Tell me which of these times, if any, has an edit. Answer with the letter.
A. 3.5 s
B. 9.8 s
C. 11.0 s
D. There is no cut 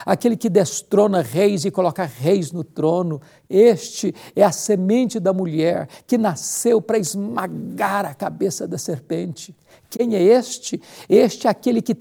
A